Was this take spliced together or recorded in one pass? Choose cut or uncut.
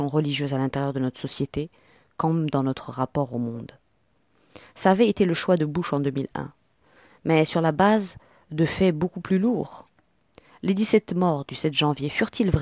uncut